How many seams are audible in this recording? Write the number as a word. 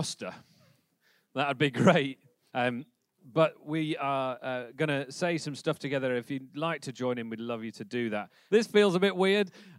two